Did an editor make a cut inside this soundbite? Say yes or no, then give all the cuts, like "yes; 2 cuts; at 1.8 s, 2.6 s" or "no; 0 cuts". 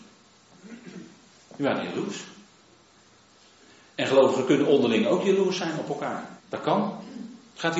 yes; 1 cut; at 6.4 s